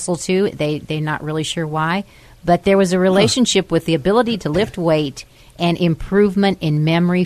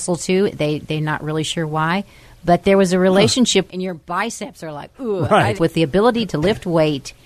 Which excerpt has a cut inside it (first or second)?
second